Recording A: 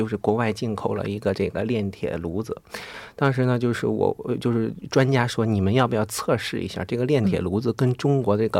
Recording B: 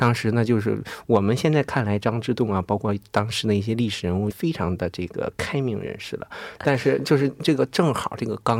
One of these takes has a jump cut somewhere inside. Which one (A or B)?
B